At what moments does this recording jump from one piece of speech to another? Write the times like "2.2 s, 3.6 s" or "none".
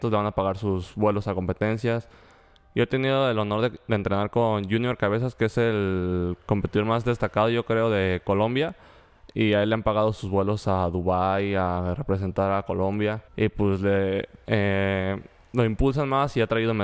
13.3 s, 14.4 s